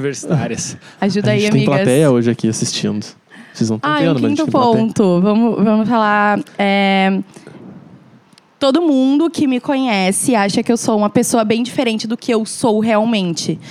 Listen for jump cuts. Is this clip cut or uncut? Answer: uncut